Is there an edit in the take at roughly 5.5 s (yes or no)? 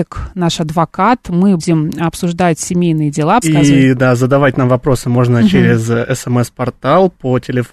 no